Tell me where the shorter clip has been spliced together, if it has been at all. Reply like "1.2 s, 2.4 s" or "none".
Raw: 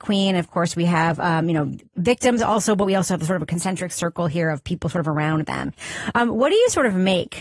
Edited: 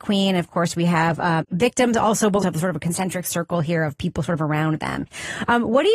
1.4 s, 2.4 s